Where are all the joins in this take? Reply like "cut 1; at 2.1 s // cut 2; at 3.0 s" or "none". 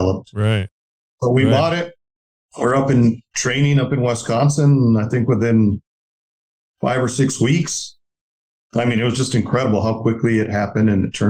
none